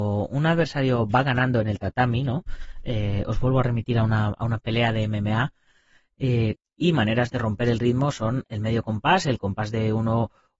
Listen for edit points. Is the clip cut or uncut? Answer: cut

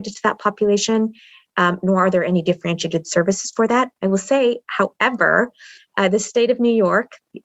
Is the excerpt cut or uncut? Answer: uncut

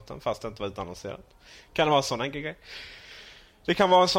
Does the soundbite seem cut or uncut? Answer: uncut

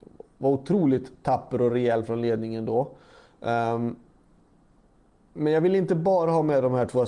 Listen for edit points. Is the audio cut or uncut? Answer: uncut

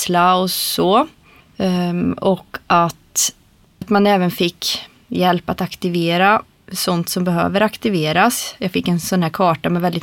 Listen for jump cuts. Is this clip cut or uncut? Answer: cut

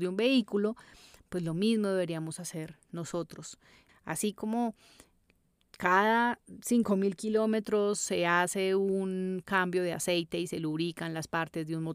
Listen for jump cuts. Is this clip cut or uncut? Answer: cut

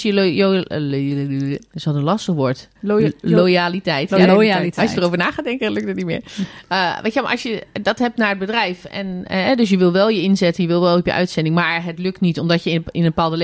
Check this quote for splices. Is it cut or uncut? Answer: cut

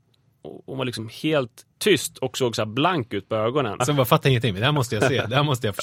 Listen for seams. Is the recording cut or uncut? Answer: cut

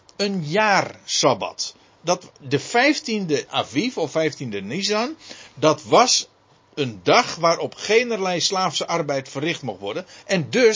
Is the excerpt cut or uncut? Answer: uncut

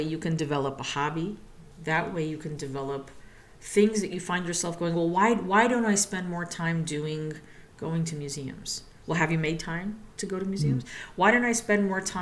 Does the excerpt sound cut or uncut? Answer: cut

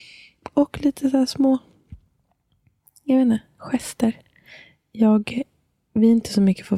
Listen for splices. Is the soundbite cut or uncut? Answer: uncut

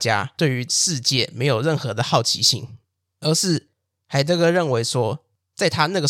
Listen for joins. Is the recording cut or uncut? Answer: uncut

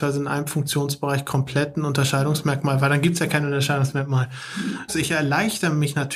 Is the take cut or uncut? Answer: cut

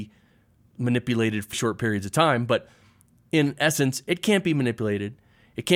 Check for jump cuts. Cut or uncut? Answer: cut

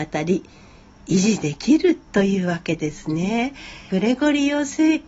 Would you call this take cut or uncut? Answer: cut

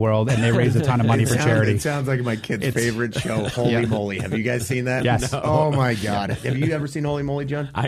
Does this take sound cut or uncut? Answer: uncut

